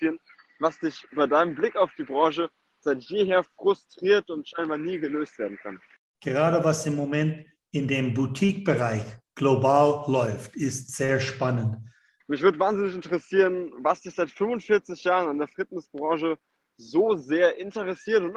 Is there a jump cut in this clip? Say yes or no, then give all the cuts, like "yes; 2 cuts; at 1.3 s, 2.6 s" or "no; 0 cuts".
yes; 2 cuts; at 6.1 s, 12.2 s